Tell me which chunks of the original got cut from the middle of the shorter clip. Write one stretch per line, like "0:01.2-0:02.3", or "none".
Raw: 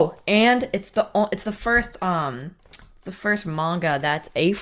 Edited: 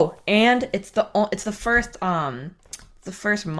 none